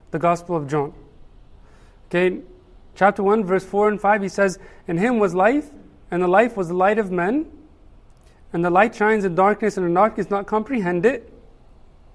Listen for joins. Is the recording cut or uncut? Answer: uncut